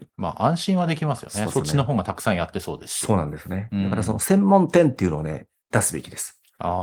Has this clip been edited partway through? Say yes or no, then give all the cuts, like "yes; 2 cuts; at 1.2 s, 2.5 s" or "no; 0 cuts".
no; 0 cuts